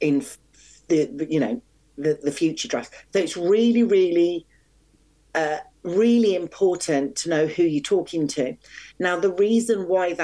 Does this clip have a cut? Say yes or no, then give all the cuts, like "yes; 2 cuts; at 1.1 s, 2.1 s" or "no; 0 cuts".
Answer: no; 0 cuts